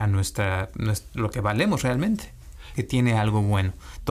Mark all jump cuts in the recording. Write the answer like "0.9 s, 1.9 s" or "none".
2.7 s